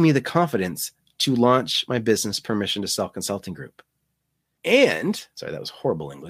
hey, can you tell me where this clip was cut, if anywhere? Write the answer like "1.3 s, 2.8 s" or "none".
4.6 s